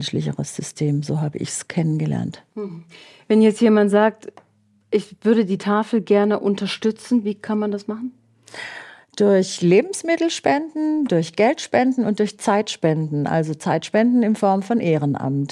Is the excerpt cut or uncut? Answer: uncut